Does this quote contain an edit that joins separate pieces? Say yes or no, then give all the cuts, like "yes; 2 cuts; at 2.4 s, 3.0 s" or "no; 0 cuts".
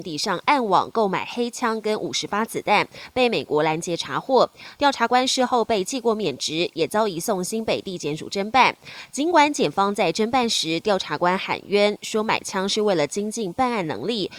no; 0 cuts